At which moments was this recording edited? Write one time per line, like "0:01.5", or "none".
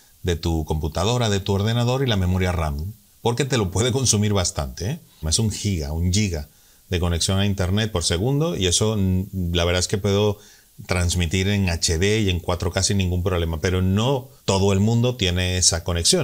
0:05.2
0:14.4